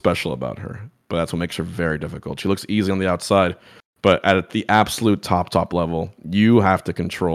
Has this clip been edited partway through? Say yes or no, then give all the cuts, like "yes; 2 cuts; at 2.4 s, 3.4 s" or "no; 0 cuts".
no; 0 cuts